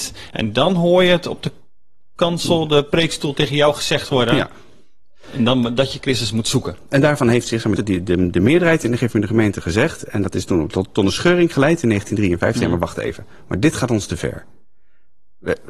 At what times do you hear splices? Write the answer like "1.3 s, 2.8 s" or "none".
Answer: 7.8 s